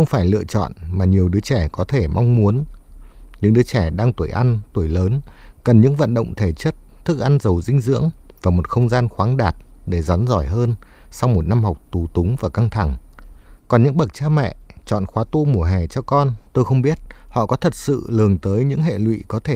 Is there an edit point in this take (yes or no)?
yes